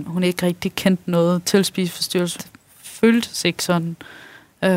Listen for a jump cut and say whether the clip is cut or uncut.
cut